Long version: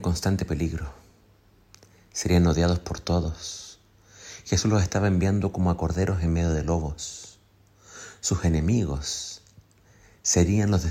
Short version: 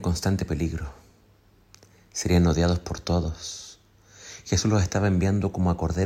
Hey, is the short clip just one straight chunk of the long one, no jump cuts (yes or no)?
yes